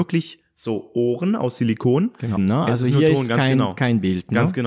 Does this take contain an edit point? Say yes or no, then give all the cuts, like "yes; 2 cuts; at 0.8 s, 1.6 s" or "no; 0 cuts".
yes; 1 cut; at 2.4 s